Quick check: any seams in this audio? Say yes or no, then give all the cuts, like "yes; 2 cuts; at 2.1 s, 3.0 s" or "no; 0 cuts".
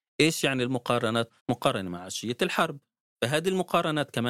yes; 1 cut; at 1.4 s